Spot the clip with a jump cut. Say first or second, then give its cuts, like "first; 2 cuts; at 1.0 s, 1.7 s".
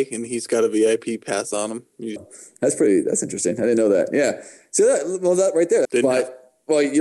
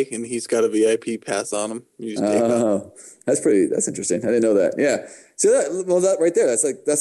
first; 2 cuts; at 2.2 s, 5.8 s